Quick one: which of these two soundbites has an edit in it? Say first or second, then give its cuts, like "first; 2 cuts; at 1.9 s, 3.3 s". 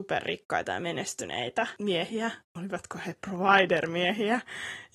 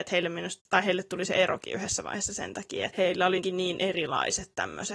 second; 1 cut; at 3.4 s